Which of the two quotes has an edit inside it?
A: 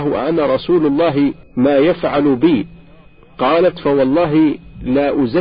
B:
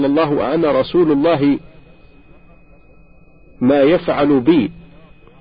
A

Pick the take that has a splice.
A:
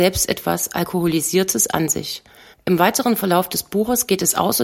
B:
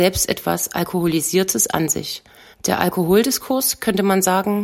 A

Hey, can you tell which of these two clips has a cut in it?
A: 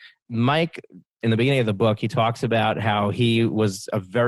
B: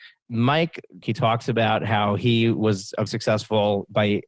B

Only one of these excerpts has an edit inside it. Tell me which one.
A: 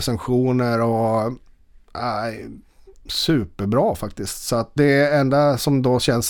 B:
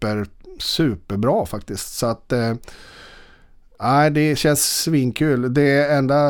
A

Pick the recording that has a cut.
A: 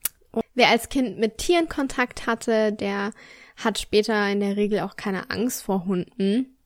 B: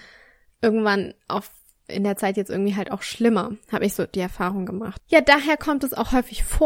B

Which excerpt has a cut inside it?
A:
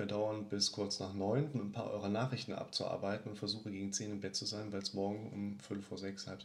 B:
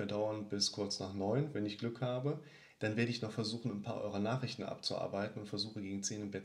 A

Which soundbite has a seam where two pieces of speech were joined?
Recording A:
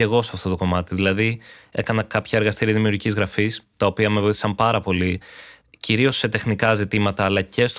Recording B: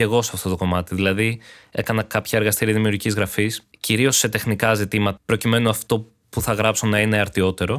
B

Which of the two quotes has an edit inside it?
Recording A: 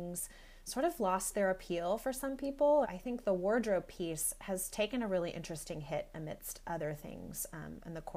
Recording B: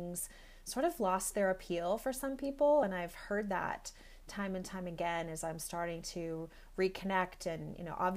A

